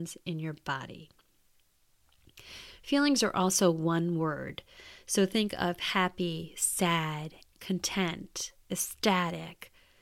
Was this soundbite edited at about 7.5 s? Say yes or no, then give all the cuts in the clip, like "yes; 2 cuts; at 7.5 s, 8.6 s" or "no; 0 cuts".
yes; 1 cut; at 7.5 s